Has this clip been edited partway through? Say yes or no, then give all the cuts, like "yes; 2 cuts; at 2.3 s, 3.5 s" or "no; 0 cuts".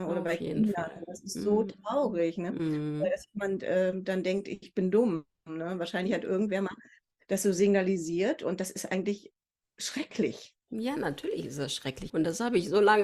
yes; 1 cut; at 12.1 s